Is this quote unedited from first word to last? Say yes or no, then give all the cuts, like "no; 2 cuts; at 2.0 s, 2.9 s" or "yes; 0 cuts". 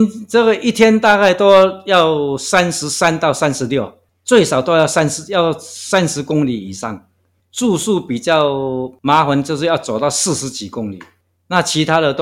no; 1 cut; at 7.4 s